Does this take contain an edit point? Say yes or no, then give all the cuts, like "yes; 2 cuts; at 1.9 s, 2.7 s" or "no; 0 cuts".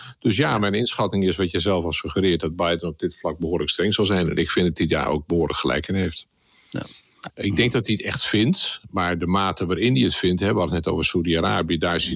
yes; 1 cut; at 7.3 s